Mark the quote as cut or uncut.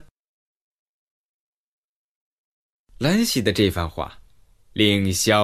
uncut